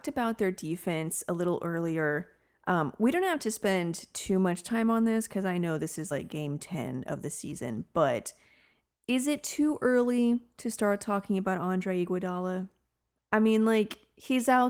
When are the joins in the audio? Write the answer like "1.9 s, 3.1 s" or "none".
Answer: none